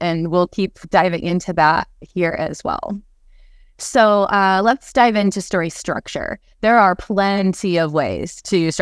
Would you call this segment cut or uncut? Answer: uncut